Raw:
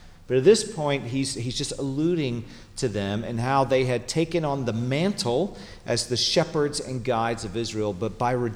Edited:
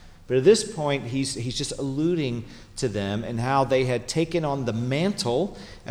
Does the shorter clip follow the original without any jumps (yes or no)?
yes